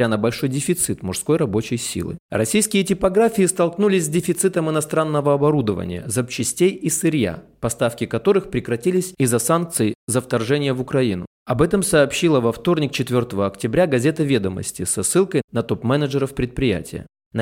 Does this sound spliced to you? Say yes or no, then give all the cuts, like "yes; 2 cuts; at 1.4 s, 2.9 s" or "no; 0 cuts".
yes; 1 cut; at 2.2 s